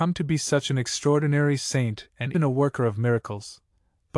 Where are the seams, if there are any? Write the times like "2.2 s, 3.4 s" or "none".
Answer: 2.3 s

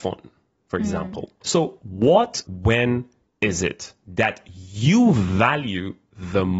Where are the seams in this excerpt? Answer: 1.4 s, 2.4 s

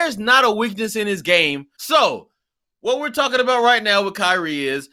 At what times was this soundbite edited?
1.8 s

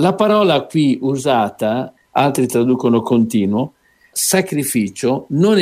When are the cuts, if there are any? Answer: 2.0 s, 4.1 s

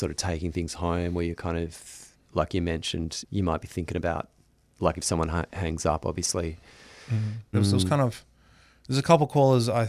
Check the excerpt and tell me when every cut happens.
3.2 s, 7.5 s

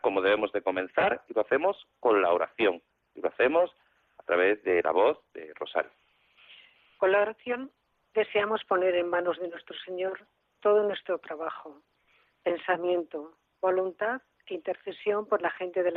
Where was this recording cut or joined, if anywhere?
none

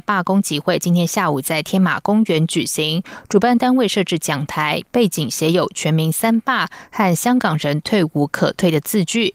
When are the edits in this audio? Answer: none

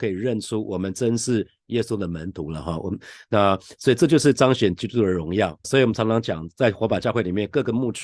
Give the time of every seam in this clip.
5.6 s

